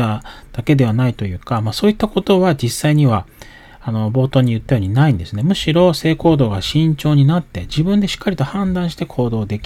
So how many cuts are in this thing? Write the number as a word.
zero